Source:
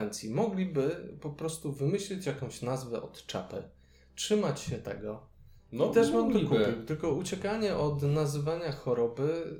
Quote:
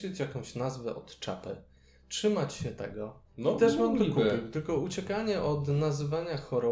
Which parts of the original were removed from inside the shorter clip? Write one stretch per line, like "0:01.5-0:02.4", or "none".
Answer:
0:05.3-0:05.6